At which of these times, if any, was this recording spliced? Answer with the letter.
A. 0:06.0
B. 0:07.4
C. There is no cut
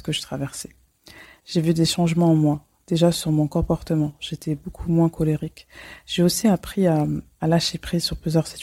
B